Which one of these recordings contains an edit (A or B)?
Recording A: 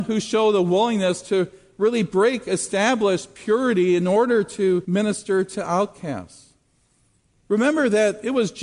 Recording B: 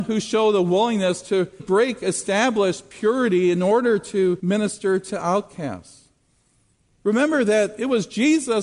B